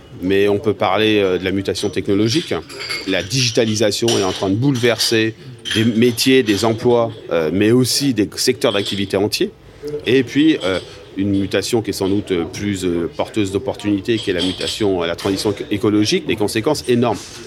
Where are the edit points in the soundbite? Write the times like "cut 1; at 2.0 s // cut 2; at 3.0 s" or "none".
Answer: cut 1; at 10.0 s // cut 2; at 16.3 s